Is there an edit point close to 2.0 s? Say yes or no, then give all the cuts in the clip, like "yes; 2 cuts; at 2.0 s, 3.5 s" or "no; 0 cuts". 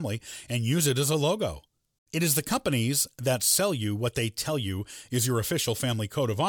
yes; 1 cut; at 2.0 s